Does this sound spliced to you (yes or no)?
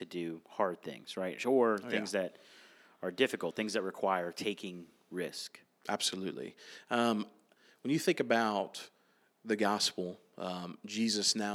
no